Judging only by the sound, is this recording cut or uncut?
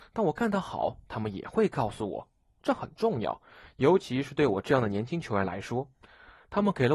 uncut